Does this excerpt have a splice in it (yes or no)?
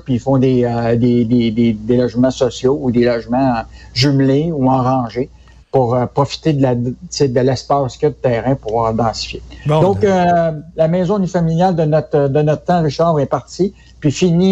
no